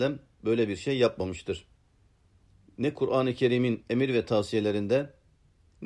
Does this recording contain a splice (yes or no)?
no